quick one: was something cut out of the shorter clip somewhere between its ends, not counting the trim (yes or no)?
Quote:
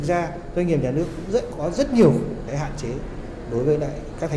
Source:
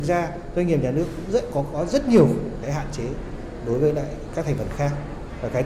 yes